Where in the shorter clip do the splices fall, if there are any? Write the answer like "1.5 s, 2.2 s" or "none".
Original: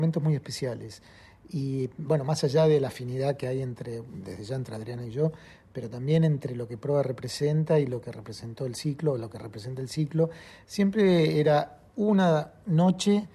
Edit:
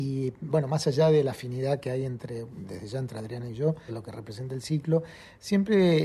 3.9 s